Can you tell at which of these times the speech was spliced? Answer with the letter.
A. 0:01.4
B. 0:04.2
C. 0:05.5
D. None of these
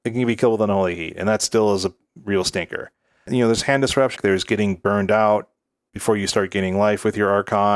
B